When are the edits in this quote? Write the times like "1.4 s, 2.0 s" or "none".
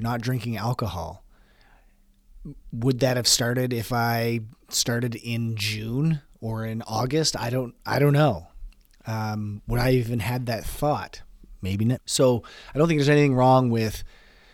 12.0 s